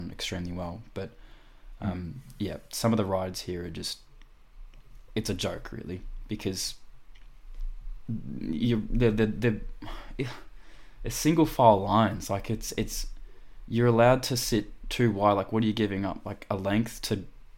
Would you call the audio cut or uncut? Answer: uncut